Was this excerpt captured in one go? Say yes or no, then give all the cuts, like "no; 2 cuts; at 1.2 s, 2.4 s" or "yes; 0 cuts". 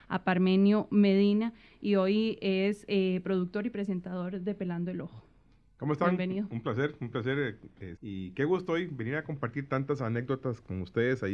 no; 1 cut; at 8.0 s